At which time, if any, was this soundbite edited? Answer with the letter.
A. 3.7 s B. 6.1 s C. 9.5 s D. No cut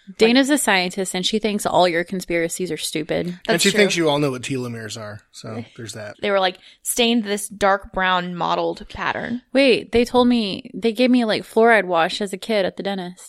B